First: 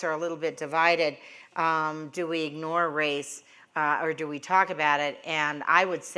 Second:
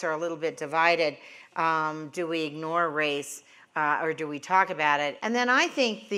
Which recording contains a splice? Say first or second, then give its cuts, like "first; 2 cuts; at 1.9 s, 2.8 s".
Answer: second; 1 cut; at 5.2 s